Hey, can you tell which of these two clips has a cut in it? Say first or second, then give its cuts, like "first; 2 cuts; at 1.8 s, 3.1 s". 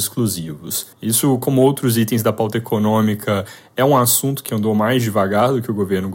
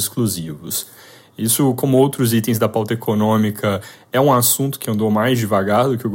first; 1 cut; at 0.9 s